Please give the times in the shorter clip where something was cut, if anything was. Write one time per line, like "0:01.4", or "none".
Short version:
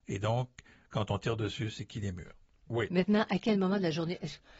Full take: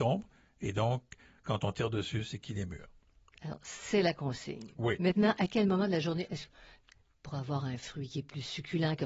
0:02.6